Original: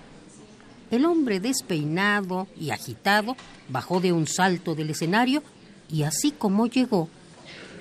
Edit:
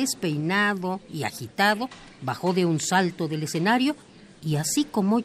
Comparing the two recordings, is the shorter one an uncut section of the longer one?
yes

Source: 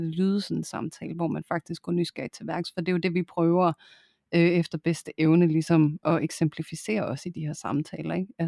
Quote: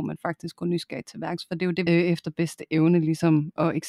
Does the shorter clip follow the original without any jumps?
no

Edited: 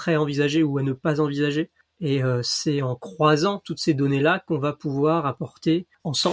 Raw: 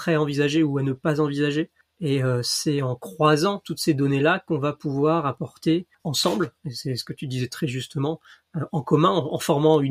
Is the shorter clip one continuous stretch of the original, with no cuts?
yes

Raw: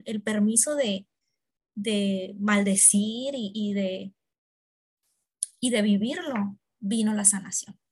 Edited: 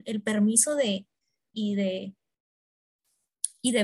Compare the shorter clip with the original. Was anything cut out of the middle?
yes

